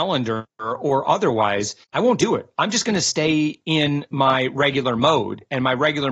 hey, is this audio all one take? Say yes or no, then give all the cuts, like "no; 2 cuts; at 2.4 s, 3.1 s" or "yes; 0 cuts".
no; 1 cut; at 1.8 s